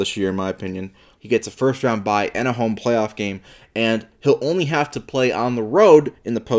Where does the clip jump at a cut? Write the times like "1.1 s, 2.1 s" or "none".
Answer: 1.2 s